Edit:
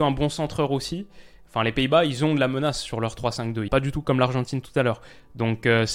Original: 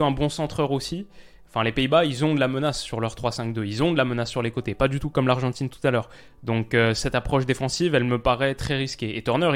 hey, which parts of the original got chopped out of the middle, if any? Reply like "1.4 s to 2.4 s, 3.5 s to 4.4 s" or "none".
3.7 s to 4.8 s